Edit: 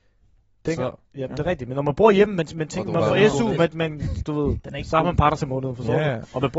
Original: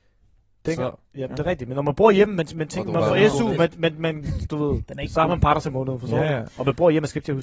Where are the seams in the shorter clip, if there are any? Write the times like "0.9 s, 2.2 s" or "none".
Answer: 3.7 s